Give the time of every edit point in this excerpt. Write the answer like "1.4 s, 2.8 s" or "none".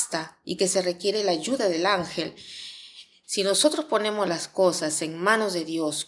3.2 s